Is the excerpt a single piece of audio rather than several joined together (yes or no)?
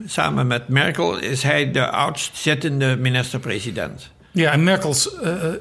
yes